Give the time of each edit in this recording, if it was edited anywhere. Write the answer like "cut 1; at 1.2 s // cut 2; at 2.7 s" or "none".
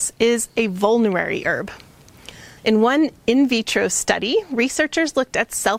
cut 1; at 2.6 s